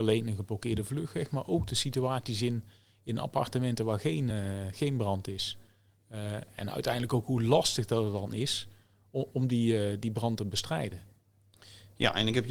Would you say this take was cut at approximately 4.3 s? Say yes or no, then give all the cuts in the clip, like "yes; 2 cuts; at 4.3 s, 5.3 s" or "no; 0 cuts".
no; 0 cuts